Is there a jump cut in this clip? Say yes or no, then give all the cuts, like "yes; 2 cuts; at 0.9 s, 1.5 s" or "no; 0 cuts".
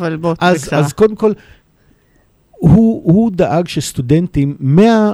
no; 0 cuts